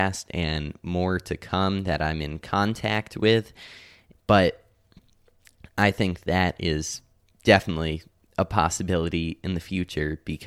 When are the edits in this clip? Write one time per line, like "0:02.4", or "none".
0:04.1
0:08.3